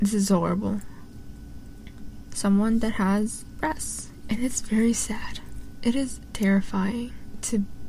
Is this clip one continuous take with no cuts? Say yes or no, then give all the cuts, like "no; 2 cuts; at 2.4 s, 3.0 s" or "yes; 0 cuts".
no; 2 cuts; at 2.3 s, 4.2 s